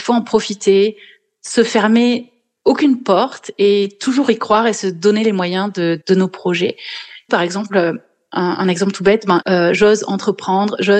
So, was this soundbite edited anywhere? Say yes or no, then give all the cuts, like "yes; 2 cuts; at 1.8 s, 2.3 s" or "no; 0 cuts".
yes; 3 cuts; at 6.0 s, 7.3 s, 9.4 s